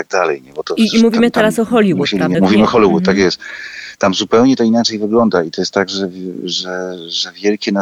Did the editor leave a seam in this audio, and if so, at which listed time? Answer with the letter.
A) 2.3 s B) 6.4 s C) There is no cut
A